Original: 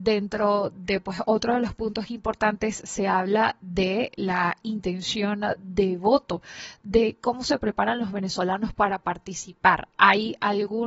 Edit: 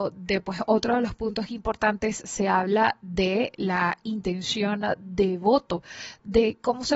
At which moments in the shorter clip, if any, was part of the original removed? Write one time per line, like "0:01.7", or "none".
none